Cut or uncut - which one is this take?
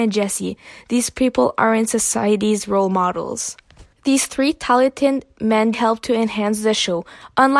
cut